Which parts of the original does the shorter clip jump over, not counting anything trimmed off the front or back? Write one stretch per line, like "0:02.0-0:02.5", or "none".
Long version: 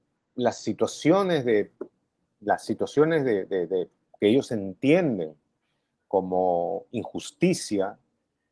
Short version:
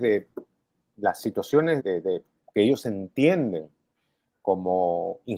0:03.2-0:03.5